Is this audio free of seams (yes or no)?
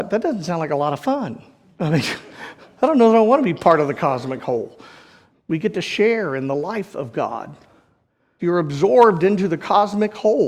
no